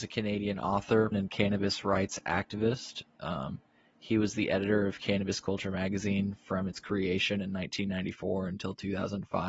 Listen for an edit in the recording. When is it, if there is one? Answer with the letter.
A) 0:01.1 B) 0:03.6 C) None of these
A